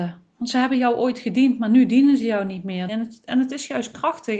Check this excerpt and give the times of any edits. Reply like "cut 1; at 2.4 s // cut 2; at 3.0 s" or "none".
cut 1; at 2.9 s